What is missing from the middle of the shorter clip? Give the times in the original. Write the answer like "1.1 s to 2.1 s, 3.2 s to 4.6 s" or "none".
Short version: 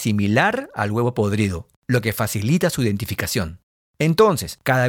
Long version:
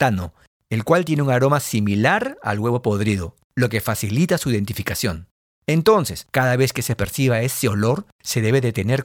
none